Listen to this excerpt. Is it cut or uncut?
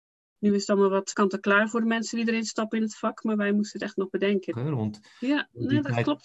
cut